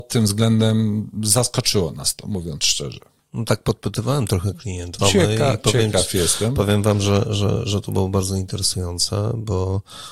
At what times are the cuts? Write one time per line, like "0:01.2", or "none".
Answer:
0:05.0